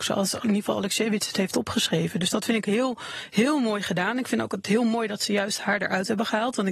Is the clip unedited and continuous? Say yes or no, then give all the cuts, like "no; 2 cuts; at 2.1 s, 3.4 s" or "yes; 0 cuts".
yes; 0 cuts